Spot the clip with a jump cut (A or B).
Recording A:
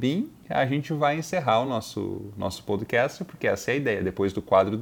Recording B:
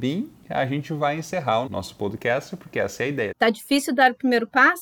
B